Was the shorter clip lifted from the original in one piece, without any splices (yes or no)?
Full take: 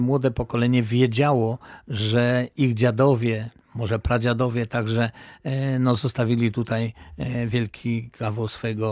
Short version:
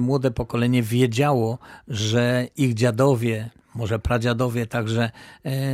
yes